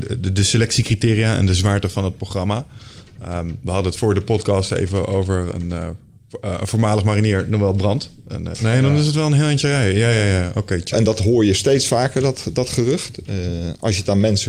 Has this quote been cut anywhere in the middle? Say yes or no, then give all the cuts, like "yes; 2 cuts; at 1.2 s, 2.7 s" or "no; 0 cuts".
yes; 2 cuts; at 8.5 s, 10.9 s